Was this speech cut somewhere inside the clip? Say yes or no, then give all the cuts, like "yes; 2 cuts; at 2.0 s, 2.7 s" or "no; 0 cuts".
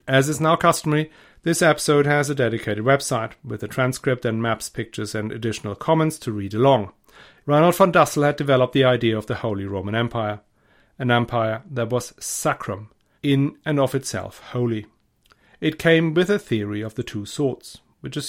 yes; 2 cuts; at 7.4 s, 13.1 s